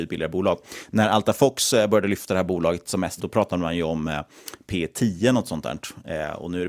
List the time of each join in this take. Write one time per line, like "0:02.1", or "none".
0:03.2